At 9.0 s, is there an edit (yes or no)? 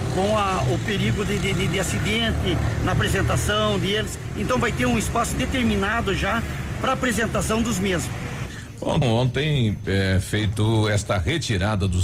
yes